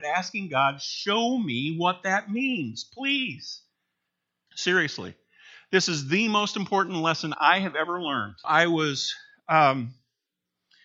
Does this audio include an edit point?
yes; 2 cuts; at 4.5 s, 8.4 s

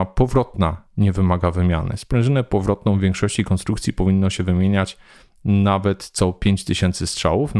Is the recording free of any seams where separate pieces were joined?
yes; 0 cuts

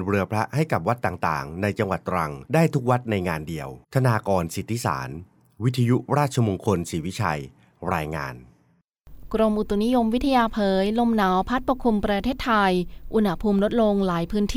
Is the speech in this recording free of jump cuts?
no; 1 cut; at 3.8 s

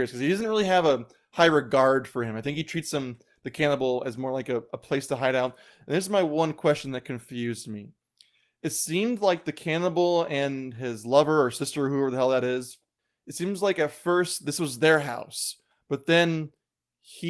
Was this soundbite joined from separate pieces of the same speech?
no; 0 cuts

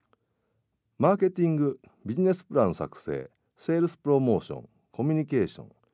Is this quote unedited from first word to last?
yes; 0 cuts

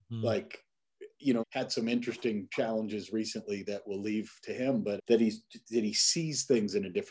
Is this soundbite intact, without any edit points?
no; 2 cuts; at 1.4 s, 5.0 s

